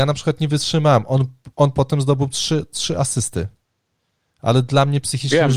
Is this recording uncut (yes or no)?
yes